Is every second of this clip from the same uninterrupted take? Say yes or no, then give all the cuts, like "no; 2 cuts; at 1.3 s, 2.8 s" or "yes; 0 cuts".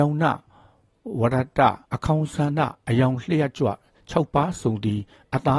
no; 1 cut; at 1.8 s